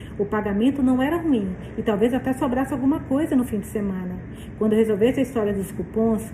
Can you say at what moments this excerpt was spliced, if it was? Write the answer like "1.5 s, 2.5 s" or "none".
none